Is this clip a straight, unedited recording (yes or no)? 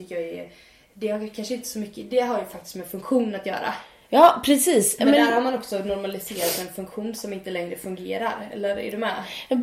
yes